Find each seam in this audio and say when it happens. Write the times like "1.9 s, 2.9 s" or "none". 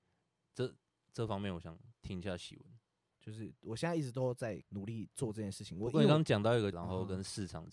3.1 s, 4.6 s, 6.7 s